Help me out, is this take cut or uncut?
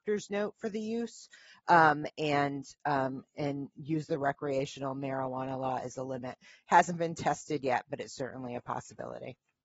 uncut